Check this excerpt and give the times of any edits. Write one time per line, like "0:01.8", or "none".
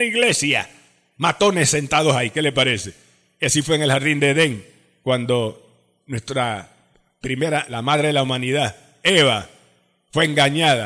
none